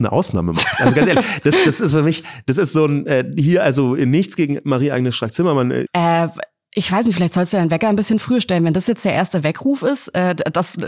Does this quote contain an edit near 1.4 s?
no; 1 cut; at 5.9 s

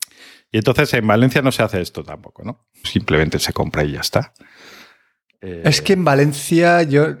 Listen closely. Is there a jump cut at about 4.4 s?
no; 1 cut; at 2.8 s

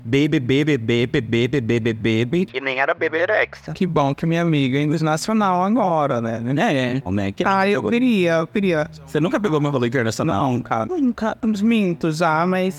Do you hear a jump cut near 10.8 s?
yes; 2 cuts; at 7.1 s, 10.8 s

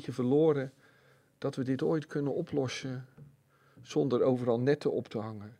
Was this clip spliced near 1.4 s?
no; 0 cuts

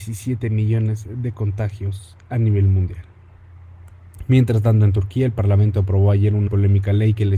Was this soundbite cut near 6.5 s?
yes; 1 cut; at 6.5 s

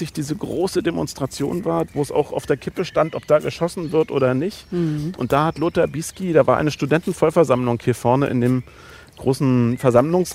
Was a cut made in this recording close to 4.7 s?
no; 0 cuts

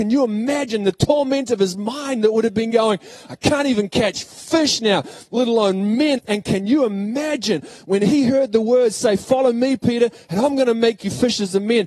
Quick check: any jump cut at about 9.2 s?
no; 1 cut; at 6.2 s

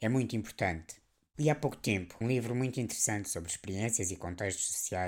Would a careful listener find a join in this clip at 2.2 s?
yes; 1 cut; at 2.2 s

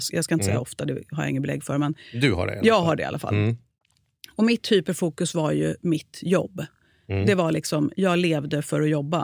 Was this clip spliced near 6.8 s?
no; 0 cuts

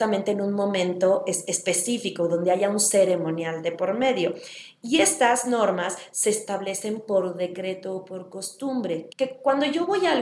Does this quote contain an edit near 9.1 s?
yes; 1 cut; at 9.1 s

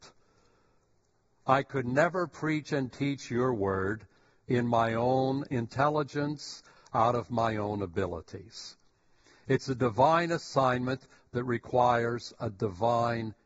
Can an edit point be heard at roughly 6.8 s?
yes; 1 cut; at 6.8 s

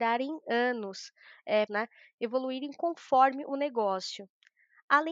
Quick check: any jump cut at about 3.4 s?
no; 1 cut; at 1.7 s

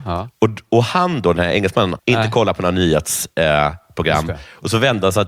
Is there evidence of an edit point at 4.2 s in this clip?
no; 1 cut; at 2.0 s

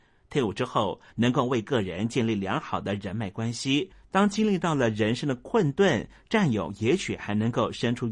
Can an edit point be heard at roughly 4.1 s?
no; 1 cut; at 1.1 s

